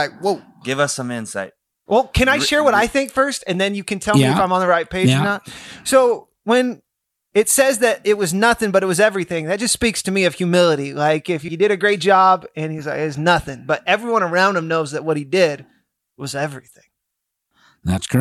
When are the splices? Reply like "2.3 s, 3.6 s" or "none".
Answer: 11.5 s